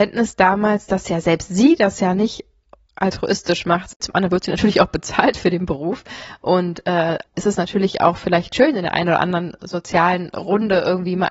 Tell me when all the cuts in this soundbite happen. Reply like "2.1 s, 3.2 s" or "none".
4.0 s, 7.3 s